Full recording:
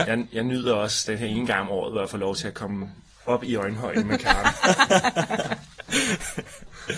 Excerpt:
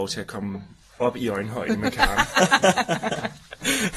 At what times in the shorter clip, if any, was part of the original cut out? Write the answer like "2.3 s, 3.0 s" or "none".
none